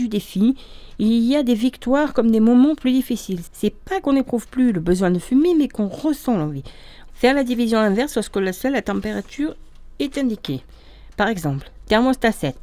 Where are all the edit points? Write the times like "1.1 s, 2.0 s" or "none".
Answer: 3.5 s, 7.1 s